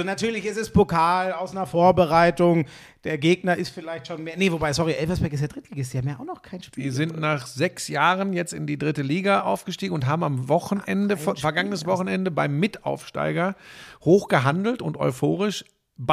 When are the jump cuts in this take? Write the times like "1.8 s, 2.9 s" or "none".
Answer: none